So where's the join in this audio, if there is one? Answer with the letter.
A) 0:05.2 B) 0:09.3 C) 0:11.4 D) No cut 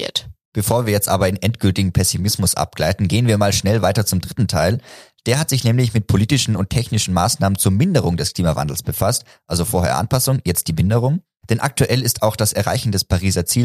D